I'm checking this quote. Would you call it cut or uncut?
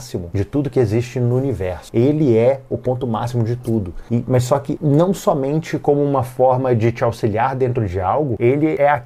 uncut